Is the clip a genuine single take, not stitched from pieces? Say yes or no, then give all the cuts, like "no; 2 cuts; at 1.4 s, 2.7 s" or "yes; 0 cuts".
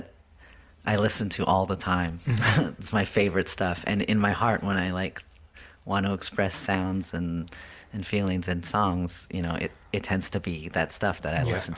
yes; 0 cuts